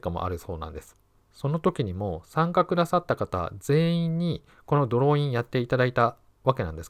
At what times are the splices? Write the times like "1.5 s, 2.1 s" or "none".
1.2 s

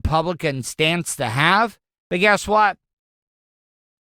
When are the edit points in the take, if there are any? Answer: none

